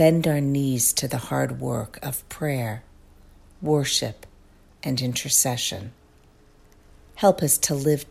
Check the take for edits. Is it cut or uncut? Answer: cut